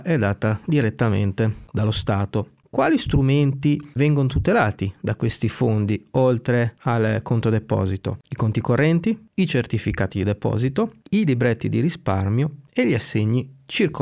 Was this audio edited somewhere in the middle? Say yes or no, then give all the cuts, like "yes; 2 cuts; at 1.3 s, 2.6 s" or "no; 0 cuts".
yes; 1 cut; at 4.0 s